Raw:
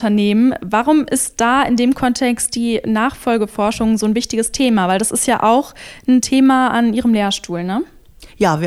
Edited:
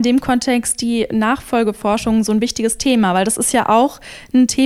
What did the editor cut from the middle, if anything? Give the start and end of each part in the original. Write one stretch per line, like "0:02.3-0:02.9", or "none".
none

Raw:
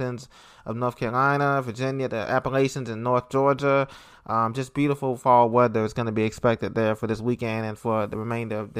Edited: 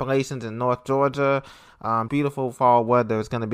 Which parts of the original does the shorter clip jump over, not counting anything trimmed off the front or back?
0:04.5-0:04.7

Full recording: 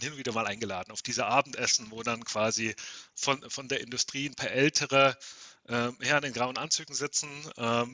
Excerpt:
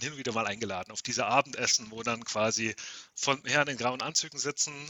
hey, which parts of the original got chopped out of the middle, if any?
0:03.4-0:06.0

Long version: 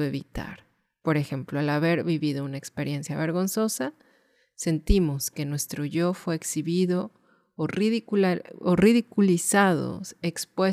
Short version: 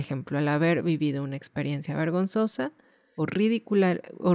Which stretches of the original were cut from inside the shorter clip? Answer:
0:04.4-0:07.6

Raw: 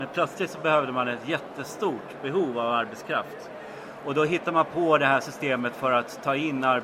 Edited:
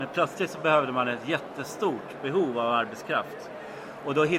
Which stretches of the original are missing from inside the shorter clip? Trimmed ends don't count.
none

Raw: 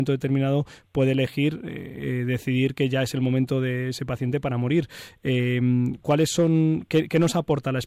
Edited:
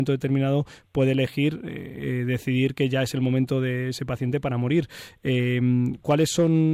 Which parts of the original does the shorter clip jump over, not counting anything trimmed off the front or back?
none

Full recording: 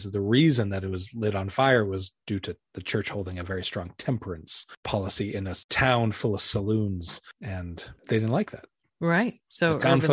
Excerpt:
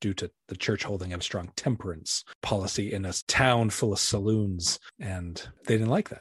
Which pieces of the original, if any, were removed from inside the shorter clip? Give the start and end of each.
0:03.5-0:03.6

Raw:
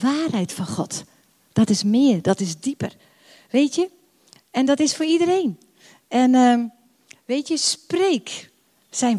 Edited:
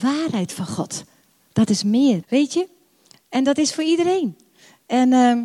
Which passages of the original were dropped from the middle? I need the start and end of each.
0:02.2-0:03.4

